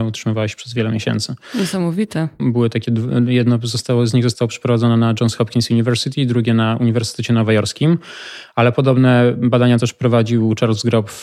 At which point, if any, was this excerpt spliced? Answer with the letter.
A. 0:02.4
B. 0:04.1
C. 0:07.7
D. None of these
A